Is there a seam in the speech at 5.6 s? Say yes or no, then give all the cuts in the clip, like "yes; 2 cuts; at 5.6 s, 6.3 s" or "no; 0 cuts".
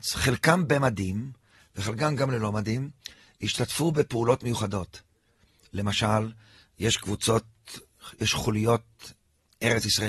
no; 0 cuts